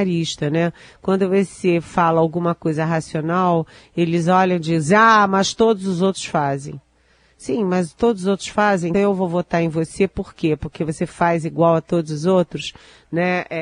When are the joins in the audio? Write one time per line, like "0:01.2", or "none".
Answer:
0:08.9

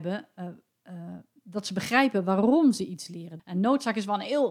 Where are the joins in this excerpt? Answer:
0:03.4

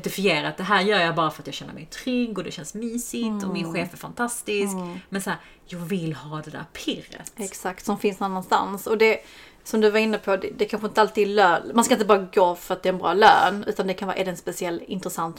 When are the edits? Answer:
none

